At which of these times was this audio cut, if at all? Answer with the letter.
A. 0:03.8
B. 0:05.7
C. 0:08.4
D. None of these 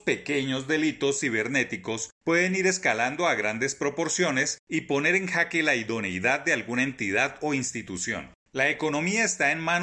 D